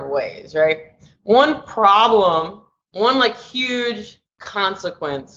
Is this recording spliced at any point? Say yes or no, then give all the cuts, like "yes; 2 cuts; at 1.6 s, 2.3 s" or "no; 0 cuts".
no; 0 cuts